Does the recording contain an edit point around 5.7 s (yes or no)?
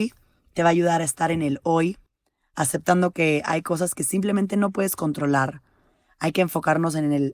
no